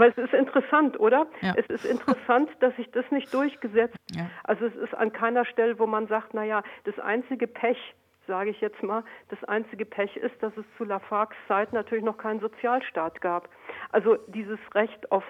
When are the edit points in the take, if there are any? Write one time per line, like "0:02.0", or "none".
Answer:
0:04.0